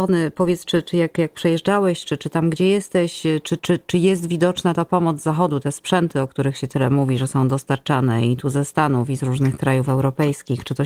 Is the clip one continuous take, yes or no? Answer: no